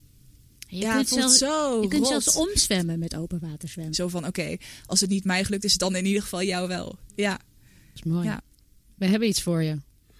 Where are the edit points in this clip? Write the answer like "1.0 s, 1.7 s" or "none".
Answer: 3.9 s